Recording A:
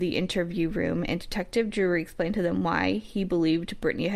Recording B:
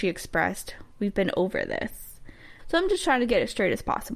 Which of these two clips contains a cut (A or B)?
B